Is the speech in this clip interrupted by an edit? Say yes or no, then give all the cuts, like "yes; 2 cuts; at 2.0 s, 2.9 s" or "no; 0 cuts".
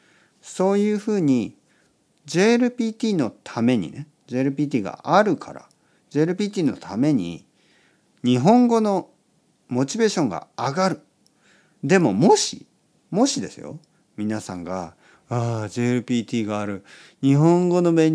yes; 1 cut; at 11.8 s